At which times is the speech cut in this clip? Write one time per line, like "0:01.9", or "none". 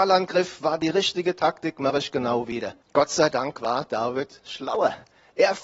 0:02.8